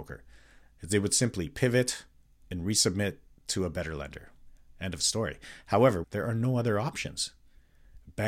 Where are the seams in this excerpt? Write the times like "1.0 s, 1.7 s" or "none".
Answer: 6.0 s

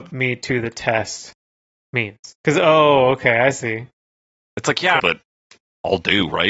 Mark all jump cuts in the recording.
2.3 s, 5.0 s

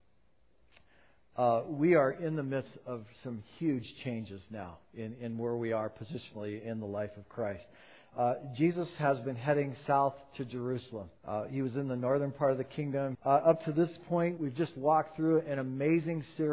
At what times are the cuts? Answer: 11.2 s, 13.1 s, 14.4 s

